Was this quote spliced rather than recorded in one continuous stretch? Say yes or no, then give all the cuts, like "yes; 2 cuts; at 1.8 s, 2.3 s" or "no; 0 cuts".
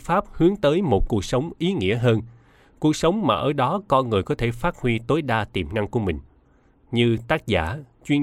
no; 0 cuts